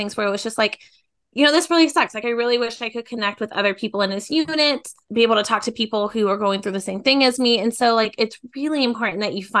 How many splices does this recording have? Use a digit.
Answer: 0